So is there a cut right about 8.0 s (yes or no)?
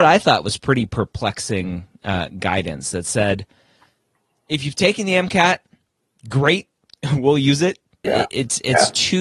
yes